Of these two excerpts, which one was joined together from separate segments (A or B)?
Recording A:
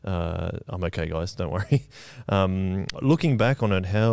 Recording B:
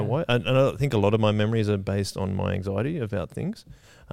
A